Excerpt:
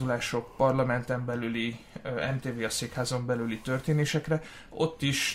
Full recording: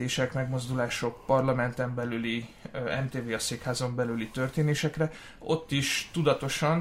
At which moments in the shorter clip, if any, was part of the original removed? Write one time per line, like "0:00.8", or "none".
none